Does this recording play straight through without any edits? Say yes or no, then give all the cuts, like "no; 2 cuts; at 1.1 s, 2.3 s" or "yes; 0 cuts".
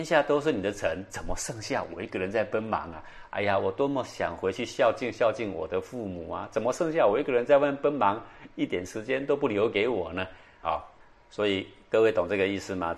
no; 1 cut; at 10.6 s